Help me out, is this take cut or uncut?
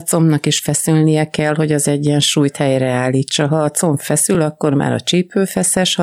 uncut